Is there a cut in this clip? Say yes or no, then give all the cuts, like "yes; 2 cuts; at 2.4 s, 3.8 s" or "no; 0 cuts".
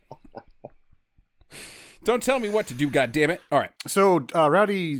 yes; 1 cut; at 3.8 s